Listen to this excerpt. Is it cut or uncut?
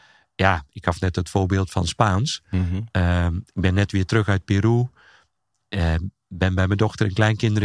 uncut